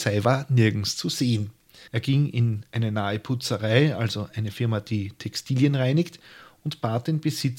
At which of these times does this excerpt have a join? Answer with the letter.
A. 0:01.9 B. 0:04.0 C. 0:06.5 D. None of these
A